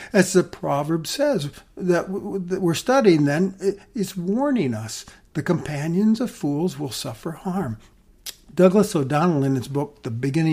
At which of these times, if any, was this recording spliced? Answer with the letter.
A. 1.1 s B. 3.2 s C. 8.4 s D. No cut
D